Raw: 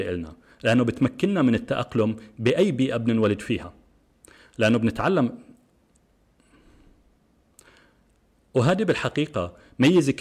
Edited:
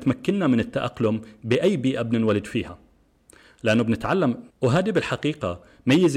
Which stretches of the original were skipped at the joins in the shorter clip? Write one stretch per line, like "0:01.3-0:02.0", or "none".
0:05.4-0:08.4